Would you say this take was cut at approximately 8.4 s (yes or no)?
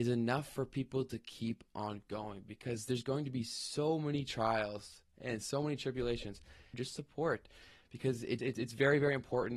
yes